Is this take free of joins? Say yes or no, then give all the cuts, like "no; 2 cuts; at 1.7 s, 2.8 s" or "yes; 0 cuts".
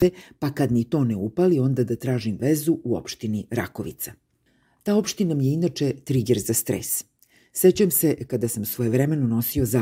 yes; 0 cuts